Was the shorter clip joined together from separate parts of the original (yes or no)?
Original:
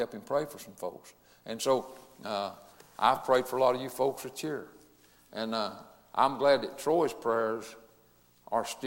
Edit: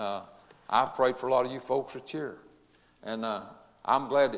no